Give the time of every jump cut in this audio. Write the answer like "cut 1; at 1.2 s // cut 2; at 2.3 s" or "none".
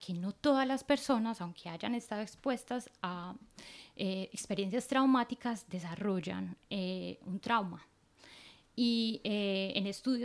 none